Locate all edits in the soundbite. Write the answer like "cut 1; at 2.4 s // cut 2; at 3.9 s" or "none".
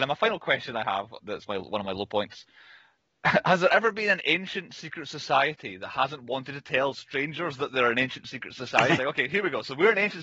cut 1; at 1.2 s // cut 2; at 9.0 s